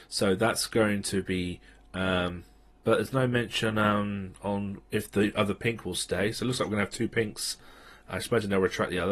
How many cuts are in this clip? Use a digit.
1